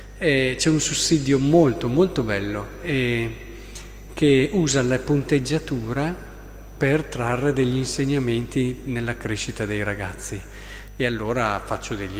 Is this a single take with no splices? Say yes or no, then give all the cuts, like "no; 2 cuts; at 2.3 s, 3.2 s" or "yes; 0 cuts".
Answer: yes; 0 cuts